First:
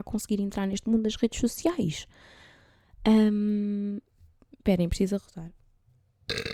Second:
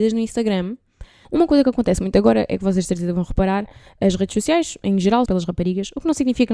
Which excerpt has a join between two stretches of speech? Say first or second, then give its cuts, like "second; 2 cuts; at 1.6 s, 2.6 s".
second; 2 cuts; at 1.2 s, 5.3 s